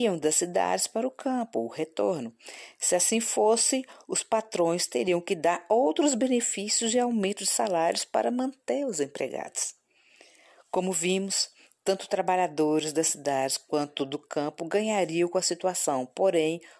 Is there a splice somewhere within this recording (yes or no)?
no